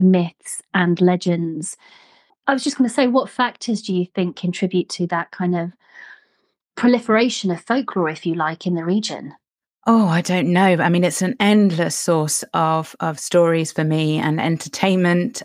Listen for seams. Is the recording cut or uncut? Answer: uncut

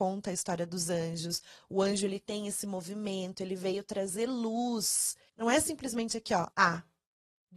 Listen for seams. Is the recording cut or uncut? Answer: cut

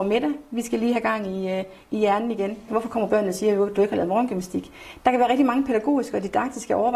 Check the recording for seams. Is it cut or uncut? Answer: cut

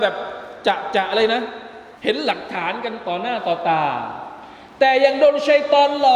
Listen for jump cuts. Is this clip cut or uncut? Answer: cut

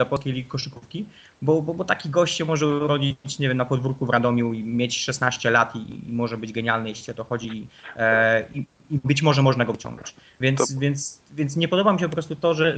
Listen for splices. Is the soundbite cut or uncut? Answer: uncut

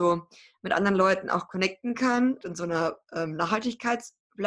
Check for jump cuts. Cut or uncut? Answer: cut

